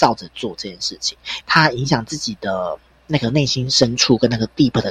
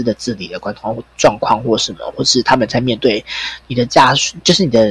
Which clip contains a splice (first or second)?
first